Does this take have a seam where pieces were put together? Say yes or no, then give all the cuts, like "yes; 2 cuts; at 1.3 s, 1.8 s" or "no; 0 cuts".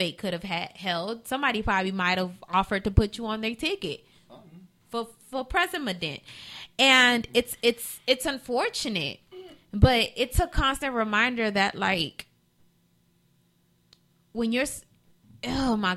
no; 0 cuts